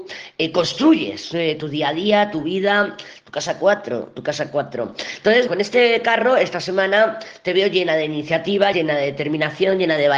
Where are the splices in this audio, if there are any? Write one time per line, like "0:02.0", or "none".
0:05.5
0:08.7